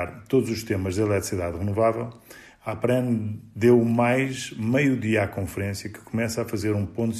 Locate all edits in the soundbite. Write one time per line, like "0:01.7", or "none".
none